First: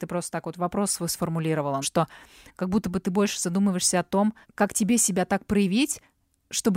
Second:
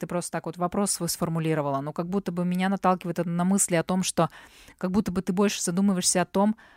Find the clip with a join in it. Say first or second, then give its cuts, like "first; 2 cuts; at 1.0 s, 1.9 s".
first; 2 cuts; at 1.8 s, 4.4 s